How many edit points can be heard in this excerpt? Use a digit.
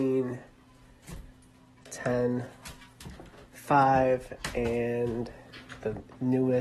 0